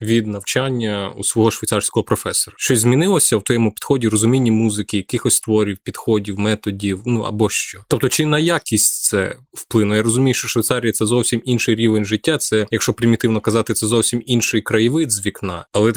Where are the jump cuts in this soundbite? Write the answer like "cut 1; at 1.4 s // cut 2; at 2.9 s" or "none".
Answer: none